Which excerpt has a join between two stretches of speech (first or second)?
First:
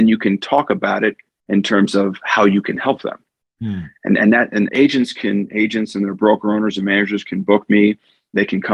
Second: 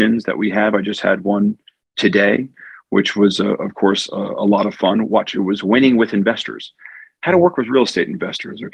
first